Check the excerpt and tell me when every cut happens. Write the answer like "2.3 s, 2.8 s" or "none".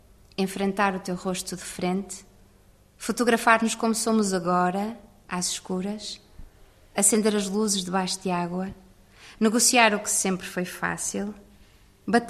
none